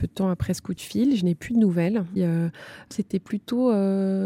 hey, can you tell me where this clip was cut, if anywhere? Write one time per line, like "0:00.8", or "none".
0:02.2